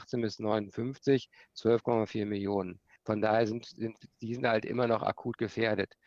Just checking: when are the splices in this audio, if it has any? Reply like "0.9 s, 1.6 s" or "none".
3.0 s